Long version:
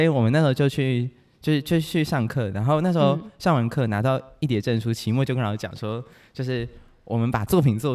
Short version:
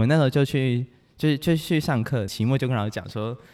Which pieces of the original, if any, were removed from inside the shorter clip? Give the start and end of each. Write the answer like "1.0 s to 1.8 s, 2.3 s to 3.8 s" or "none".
2.5 s to 4.9 s

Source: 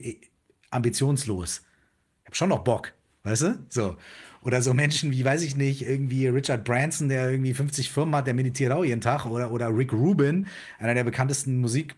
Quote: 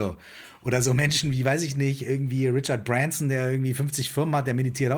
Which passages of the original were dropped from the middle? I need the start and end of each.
none

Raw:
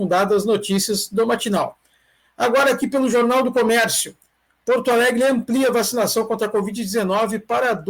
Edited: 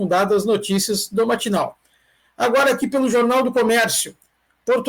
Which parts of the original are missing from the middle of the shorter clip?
none

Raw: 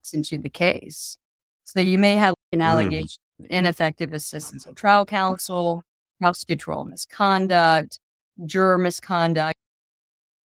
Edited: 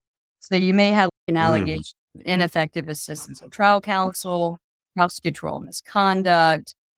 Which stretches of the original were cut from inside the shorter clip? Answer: none

